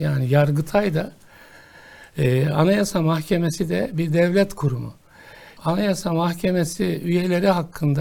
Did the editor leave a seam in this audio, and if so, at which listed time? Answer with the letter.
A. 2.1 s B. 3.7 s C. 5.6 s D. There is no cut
C